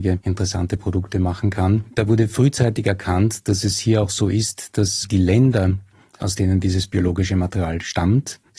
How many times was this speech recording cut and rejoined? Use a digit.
0